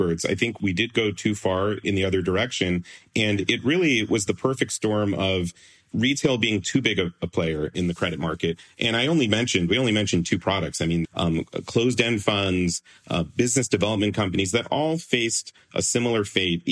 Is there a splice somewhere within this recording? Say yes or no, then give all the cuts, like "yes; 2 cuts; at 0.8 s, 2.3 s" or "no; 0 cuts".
yes; 1 cut; at 11.0 s